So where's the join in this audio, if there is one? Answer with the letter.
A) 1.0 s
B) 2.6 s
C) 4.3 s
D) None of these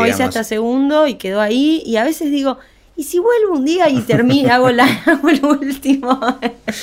D